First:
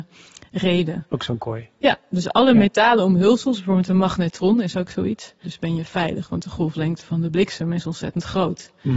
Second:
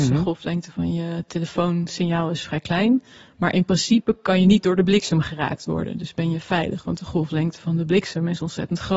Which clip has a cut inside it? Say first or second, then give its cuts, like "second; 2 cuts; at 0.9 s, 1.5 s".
first; 1 cut; at 5.4 s